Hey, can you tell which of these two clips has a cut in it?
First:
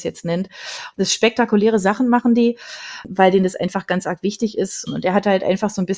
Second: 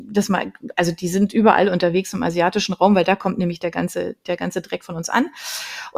first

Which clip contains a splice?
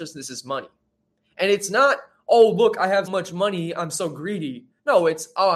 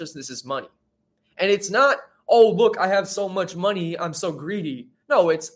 first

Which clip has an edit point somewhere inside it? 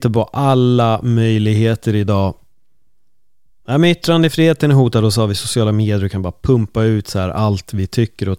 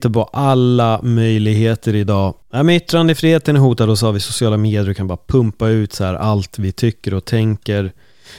second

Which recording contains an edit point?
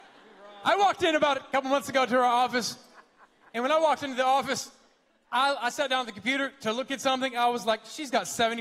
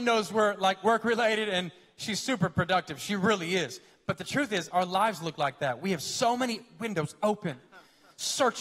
second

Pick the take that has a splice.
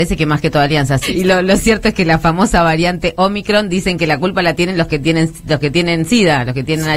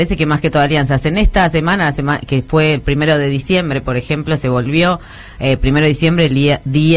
first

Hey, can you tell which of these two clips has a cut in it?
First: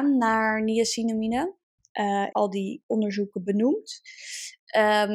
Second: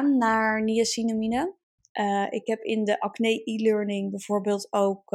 first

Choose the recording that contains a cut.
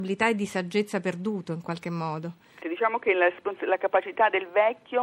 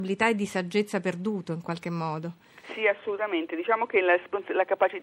first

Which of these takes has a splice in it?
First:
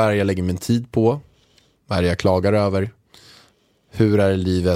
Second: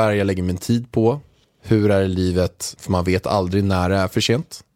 second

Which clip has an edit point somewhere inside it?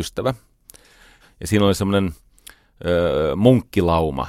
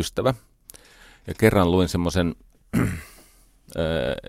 first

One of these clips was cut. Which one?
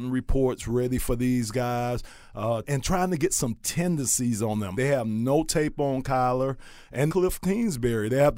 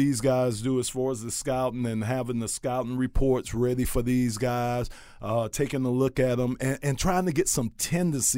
first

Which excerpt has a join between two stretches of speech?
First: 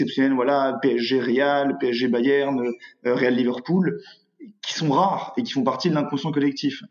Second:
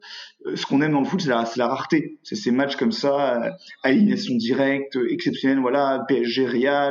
second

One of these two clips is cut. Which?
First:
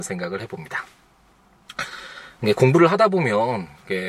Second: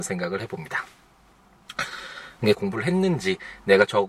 second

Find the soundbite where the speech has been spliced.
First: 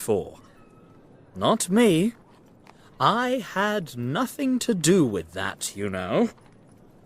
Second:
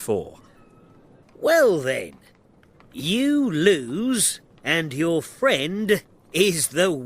second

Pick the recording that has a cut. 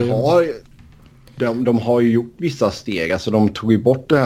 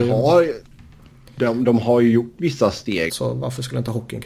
second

